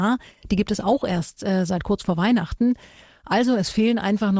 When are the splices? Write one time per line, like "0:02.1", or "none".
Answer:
none